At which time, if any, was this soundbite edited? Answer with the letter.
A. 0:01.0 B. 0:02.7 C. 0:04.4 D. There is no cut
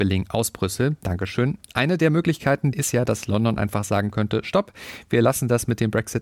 B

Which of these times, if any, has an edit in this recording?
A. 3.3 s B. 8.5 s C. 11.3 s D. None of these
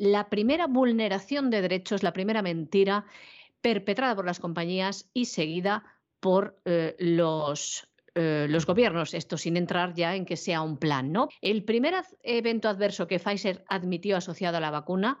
C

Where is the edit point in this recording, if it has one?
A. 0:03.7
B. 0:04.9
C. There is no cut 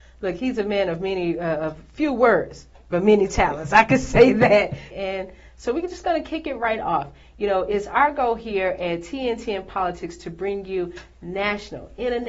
B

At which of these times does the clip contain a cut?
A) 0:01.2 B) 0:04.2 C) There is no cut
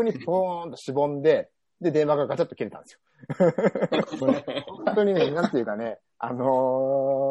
B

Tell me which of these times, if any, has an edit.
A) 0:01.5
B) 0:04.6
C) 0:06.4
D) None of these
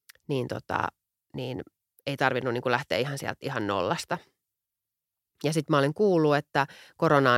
D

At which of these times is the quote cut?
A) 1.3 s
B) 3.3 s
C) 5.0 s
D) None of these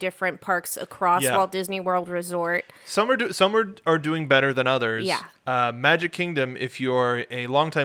D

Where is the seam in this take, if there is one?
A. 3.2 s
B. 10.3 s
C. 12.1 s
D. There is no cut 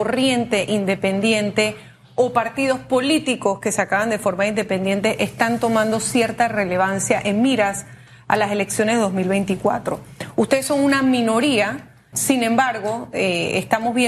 C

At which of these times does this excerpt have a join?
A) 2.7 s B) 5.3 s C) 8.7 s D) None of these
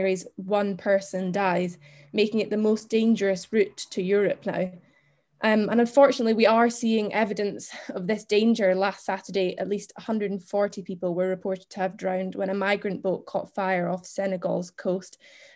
D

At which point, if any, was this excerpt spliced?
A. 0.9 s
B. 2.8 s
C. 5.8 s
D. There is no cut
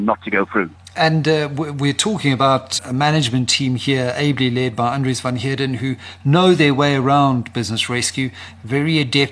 B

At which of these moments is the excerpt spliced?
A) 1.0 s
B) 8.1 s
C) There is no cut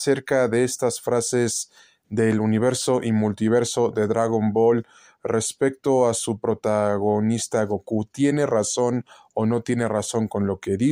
C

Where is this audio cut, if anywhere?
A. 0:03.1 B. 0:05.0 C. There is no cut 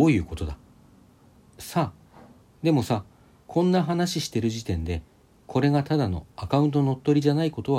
C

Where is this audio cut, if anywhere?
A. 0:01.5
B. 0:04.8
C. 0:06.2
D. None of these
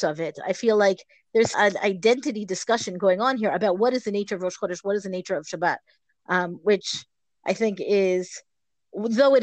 A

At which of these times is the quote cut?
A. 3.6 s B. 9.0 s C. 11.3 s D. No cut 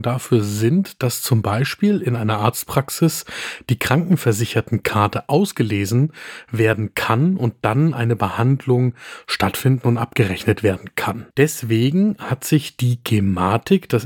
C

